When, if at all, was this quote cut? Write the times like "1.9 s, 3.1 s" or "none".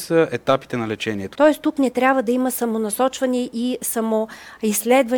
1.3 s